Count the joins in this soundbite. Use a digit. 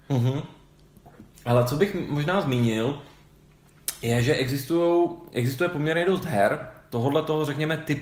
1